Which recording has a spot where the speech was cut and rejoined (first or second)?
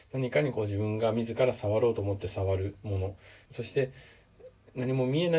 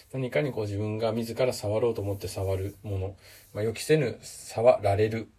first